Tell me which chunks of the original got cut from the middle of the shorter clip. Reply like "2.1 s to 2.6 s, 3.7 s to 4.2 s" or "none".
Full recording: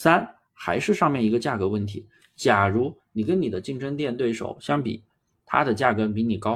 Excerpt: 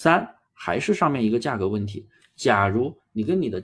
none